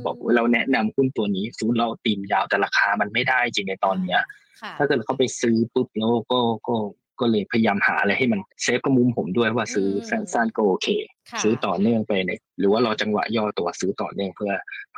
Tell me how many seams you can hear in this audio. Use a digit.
1